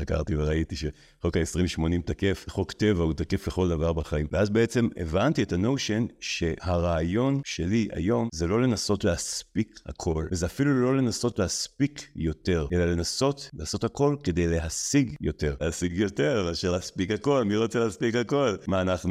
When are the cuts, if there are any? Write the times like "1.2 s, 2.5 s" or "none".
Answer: 15.6 s